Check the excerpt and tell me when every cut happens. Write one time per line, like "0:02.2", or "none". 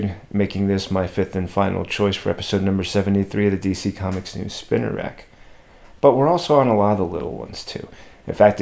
0:06.0

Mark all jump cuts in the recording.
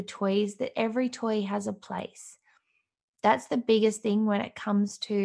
none

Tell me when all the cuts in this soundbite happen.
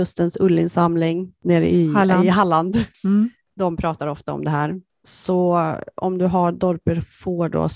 0:02.9

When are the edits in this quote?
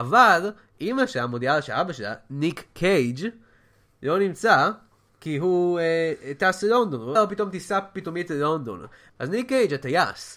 0:07.2
0:09.1

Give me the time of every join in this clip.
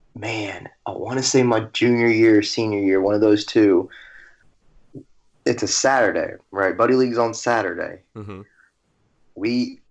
none

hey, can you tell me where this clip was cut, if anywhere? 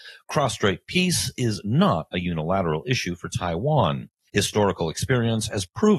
0:04.3

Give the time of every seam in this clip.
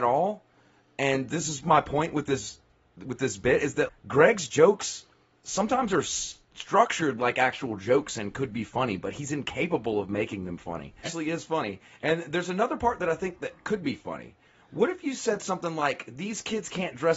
0:03.9
0:11.0

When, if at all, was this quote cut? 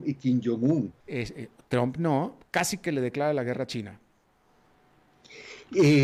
0:01.0
0:02.4

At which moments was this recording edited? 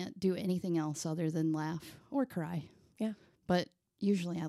none

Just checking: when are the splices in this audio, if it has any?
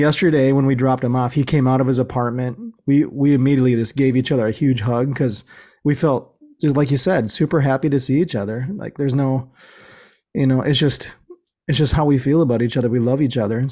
none

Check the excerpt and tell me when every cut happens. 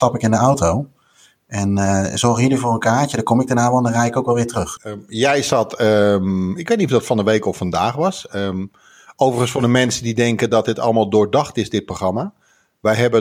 0:04.8

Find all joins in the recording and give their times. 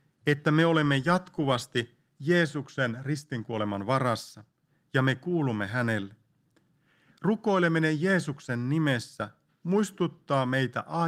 none

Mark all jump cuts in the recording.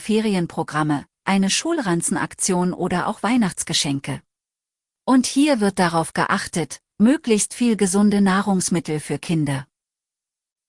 0:04.9

